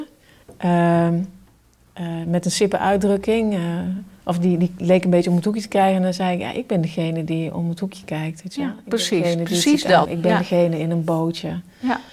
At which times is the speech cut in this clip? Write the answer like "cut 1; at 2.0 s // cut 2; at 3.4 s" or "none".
cut 1; at 10.1 s